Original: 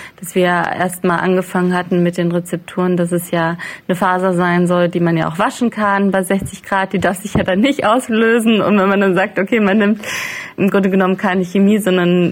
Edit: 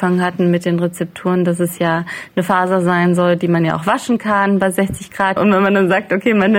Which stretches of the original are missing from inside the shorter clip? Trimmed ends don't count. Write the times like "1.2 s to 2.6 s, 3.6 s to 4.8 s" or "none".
6.9 s to 8.6 s